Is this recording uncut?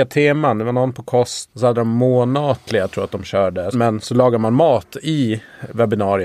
no; 2 cuts; at 1.5 s, 3.7 s

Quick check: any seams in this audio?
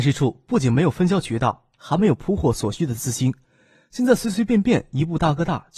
no; 0 cuts

